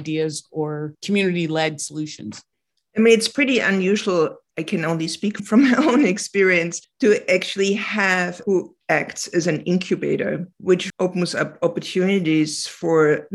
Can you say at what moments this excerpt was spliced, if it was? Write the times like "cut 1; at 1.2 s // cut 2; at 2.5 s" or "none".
cut 1; at 10.9 s